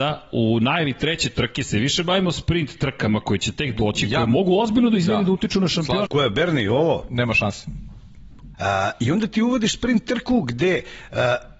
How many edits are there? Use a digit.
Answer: 2